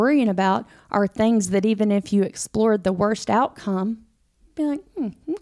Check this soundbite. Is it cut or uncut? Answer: uncut